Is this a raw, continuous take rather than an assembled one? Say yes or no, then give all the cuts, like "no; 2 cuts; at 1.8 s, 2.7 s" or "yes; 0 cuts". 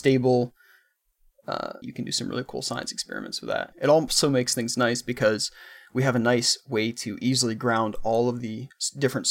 no; 2 cuts; at 1.8 s, 3.7 s